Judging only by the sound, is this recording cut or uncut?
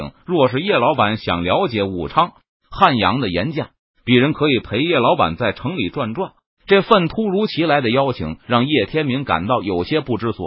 uncut